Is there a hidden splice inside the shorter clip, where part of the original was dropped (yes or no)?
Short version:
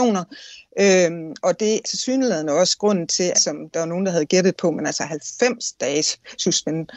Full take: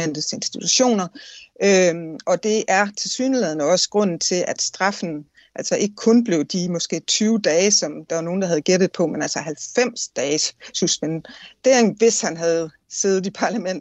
yes